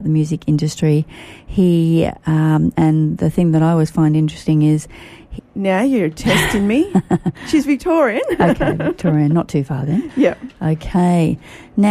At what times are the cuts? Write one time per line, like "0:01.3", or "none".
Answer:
0:02.7
0:05.4